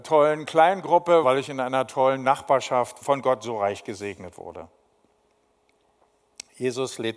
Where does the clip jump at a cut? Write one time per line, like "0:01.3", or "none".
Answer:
0:01.2
0:03.0